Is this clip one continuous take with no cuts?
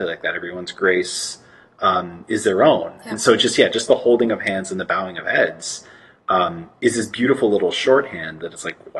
yes; 0 cuts

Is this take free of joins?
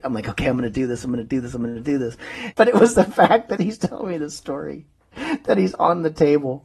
no; 2 cuts; at 2.5 s, 3.6 s

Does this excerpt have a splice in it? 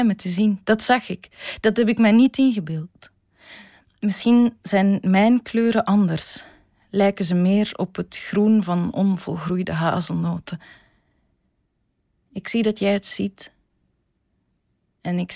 no; 0 cuts

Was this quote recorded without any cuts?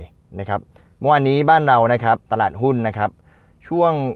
no; 1 cut; at 2.2 s

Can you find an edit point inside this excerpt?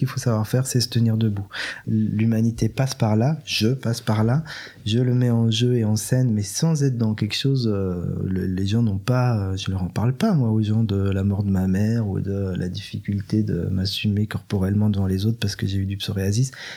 yes; 1 cut; at 1.8 s

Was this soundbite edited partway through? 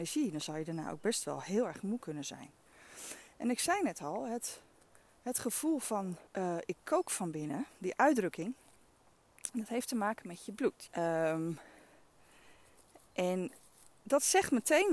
yes; 2 cuts; at 6.3 s, 10.9 s

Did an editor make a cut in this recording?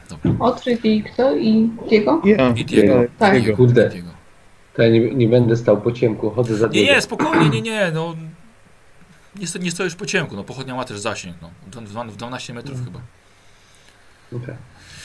no; 0 cuts

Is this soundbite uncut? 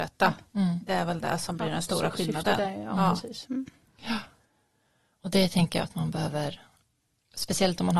yes; 0 cuts

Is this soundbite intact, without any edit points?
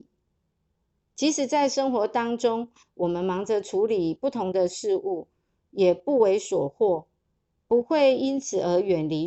no; 1 cut; at 1.1 s

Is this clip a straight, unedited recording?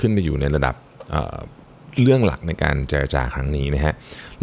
yes; 0 cuts

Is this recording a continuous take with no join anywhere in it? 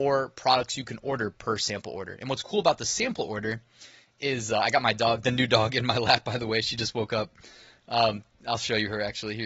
yes; 0 cuts

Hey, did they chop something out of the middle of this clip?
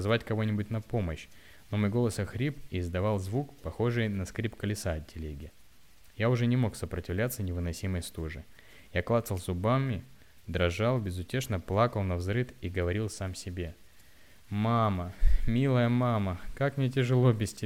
no; 0 cuts

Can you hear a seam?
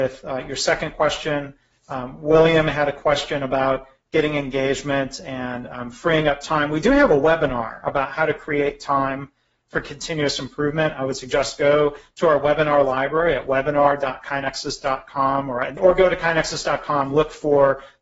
yes; 1 cut; at 15.8 s

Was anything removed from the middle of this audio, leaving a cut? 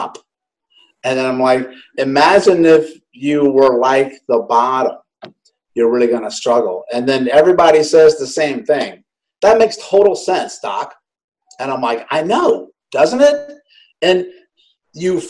yes; 1 cut; at 1.9 s

